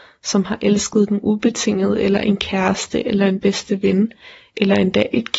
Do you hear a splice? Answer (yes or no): no